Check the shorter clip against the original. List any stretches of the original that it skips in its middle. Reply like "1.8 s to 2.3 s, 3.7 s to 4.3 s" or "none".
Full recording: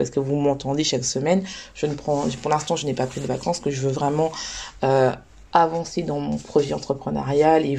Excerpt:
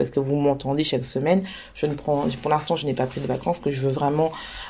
none

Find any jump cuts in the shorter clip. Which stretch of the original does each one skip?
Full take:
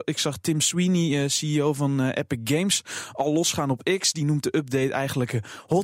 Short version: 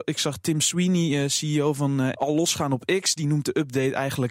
2.1 s to 3.1 s

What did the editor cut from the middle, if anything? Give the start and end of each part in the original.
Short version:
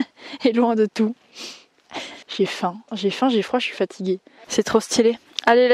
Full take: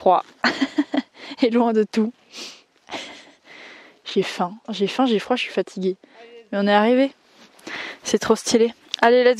3.2 s to 4.0 s, 6.2 s to 8.0 s

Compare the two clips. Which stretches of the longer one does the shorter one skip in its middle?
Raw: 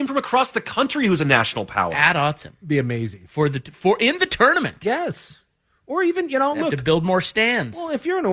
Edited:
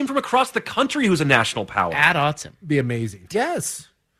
3.3 s to 4.8 s

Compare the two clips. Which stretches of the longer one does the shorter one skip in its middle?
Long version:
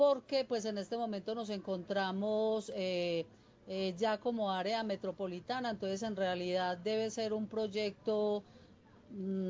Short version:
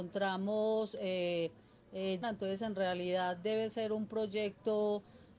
4.0 s to 5.6 s

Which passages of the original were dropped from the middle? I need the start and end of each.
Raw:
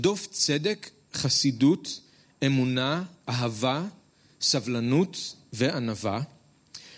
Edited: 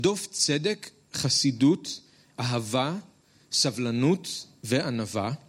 2.3 s to 3.2 s

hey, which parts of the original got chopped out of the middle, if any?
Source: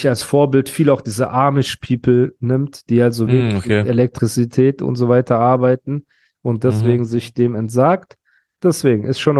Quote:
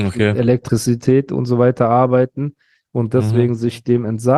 none

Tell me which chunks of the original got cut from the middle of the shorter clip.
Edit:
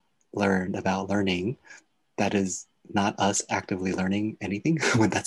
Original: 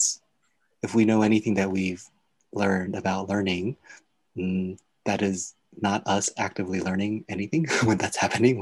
4.2 s to 4.9 s

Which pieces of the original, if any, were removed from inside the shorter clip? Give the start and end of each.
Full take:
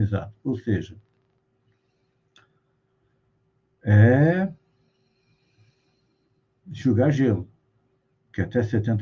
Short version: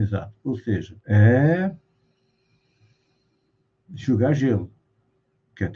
1.0 s to 3.8 s

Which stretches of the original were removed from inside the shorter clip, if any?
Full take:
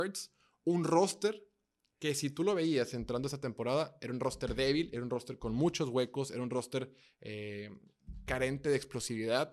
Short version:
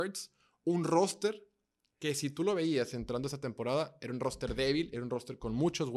none

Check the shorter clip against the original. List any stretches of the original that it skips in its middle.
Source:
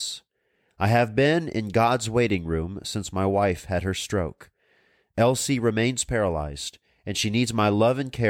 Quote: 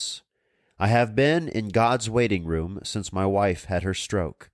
none

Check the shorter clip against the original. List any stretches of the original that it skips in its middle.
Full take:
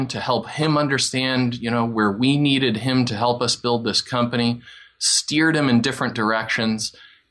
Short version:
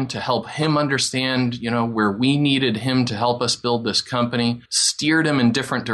4.7 s to 4.9 s

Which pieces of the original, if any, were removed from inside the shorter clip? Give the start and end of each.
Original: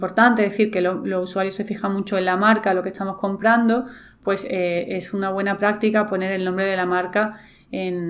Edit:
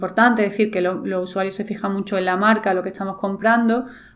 none

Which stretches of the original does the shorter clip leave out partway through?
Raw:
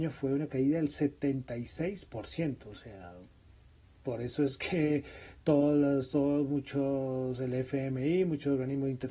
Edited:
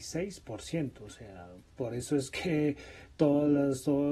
3.3 s to 3.9 s

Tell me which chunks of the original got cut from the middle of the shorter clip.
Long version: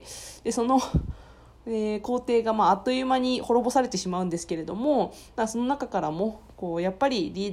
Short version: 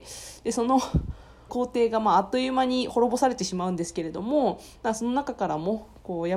1.5 s to 2.0 s

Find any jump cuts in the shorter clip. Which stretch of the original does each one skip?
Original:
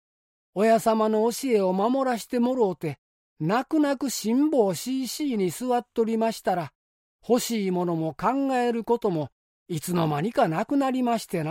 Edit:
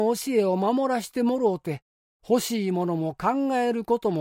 3.2 s to 7.0 s

